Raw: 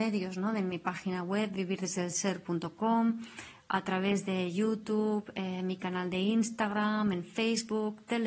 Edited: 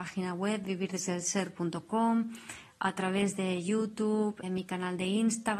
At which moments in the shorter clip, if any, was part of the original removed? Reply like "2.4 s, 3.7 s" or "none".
4.4 s